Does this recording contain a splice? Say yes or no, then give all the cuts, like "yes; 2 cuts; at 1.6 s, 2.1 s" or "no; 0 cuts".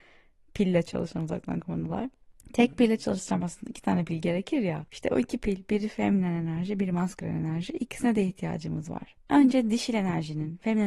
yes; 2 cuts; at 4.9 s, 9.2 s